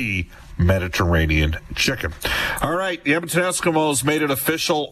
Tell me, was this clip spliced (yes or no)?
no